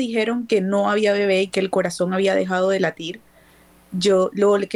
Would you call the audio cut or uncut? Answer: uncut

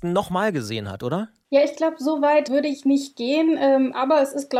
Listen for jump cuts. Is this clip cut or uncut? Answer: cut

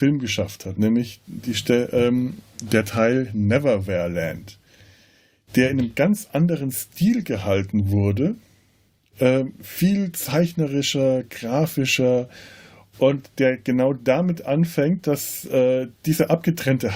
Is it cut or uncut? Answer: uncut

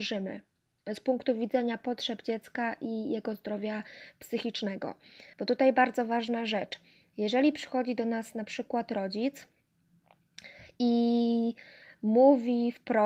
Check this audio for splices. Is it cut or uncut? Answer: uncut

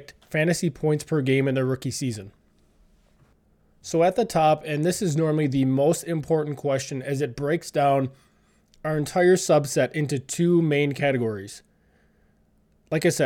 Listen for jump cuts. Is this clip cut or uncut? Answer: uncut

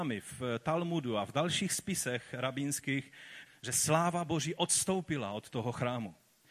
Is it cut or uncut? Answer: cut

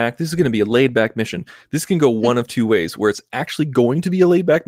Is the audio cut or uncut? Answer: uncut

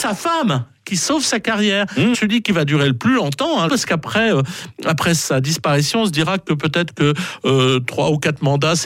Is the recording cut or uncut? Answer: cut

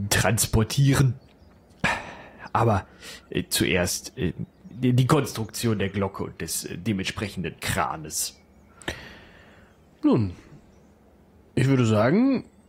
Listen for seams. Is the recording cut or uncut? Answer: cut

